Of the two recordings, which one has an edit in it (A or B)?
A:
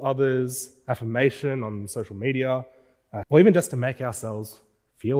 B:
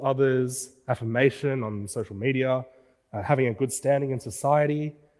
A